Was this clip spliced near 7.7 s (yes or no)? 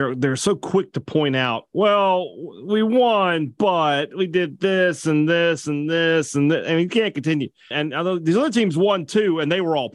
yes